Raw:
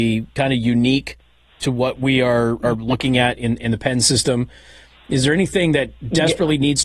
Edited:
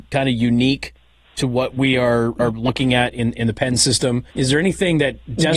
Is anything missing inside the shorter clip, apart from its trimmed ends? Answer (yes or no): yes